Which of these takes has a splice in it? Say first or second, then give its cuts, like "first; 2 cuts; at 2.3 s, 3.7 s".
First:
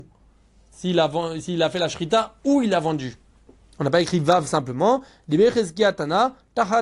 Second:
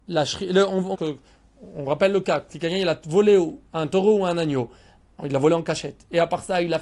second; 1 cut; at 0.9 s